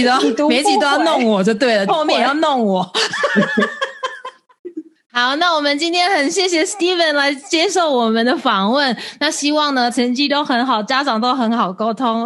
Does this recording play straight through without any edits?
no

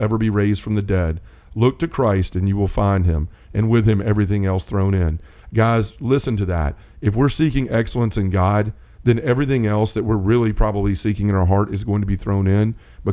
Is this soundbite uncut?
yes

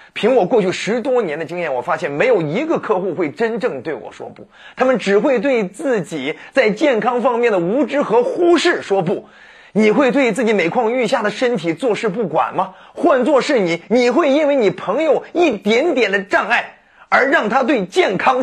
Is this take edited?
no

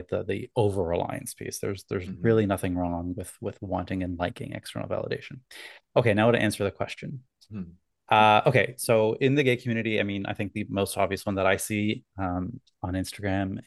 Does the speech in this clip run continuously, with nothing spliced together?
yes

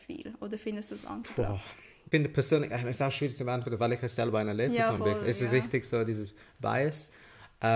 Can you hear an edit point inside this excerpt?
no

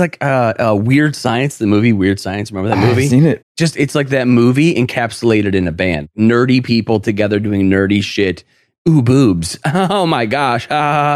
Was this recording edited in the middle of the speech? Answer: yes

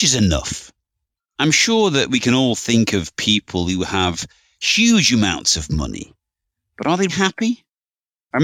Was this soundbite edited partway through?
yes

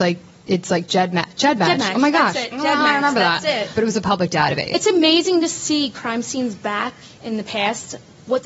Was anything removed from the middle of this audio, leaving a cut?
yes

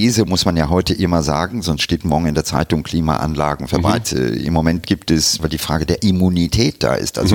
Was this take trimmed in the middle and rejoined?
yes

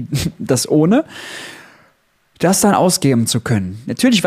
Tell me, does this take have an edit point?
no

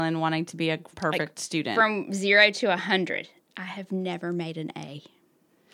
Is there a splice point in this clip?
yes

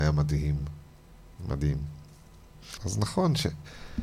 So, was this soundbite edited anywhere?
yes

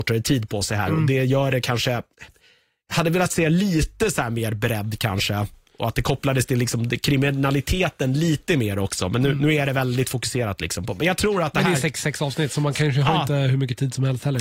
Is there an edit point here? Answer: no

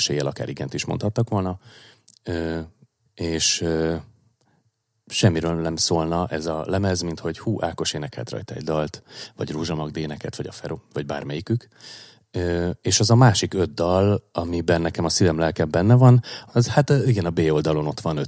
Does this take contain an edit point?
yes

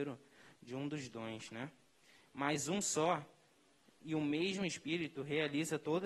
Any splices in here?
yes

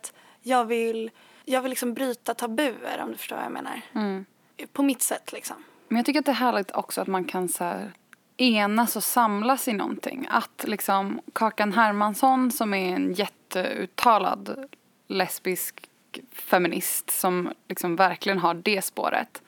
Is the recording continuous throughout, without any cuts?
yes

